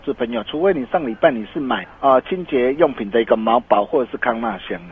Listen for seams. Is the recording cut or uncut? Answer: cut